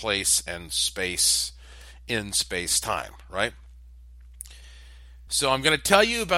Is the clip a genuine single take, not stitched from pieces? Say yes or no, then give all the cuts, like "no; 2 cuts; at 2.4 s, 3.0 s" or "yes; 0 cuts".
yes; 0 cuts